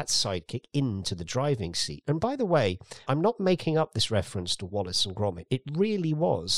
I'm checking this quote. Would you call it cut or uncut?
cut